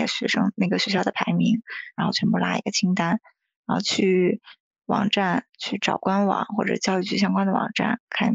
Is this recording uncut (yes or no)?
no